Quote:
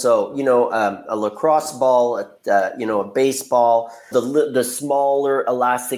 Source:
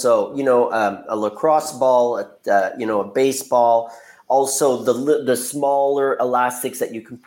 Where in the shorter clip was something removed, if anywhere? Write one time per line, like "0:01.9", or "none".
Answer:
0:04.1